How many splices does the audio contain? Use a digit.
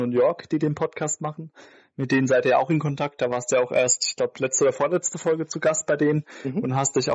0